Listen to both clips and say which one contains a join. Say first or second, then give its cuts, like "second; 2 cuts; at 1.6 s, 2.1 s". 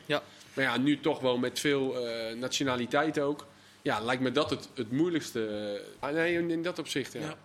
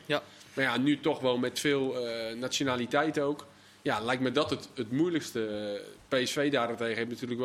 first; 1 cut; at 6.0 s